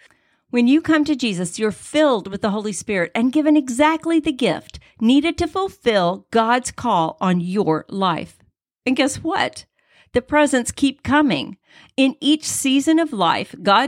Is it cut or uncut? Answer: uncut